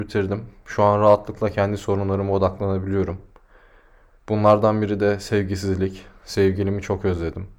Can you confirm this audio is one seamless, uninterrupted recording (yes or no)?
yes